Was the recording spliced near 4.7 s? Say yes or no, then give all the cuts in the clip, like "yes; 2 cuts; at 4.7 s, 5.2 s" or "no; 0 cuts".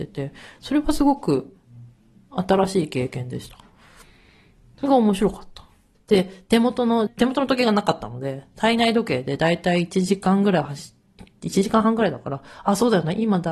no; 2 cuts; at 5.9 s, 7.1 s